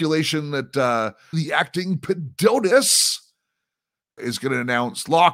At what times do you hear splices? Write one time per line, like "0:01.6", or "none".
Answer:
0:01.3
0:04.2